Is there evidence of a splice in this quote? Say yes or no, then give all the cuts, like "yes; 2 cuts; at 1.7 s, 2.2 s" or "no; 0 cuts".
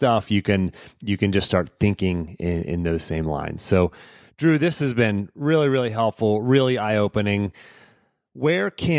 no; 0 cuts